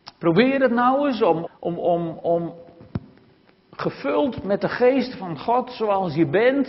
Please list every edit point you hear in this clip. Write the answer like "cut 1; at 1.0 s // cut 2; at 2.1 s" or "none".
cut 1; at 1.5 s